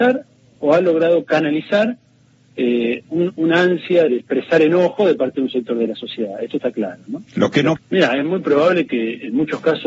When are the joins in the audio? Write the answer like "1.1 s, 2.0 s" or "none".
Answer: 4.1 s, 7.8 s